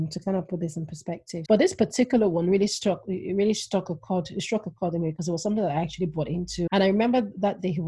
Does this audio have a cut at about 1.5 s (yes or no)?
yes